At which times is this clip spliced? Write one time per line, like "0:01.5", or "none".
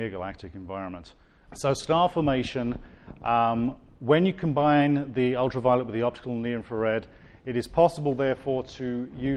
0:01.5